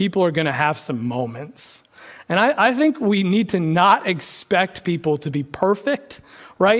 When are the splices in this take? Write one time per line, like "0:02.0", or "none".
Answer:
none

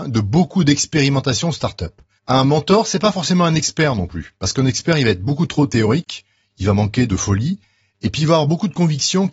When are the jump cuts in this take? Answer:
0:02.2

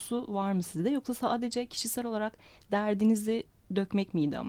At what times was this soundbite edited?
none

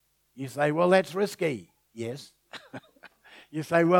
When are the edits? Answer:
none

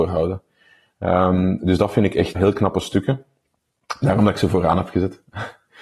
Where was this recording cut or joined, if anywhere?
0:02.3

